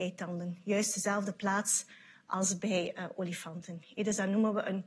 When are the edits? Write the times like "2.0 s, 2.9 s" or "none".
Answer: none